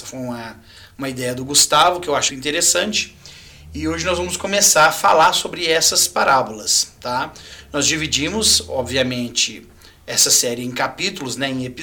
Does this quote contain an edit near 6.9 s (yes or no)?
no